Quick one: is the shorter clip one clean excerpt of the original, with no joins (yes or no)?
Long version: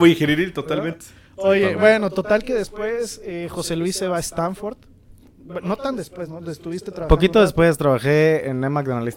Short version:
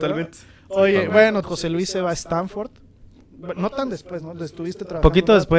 no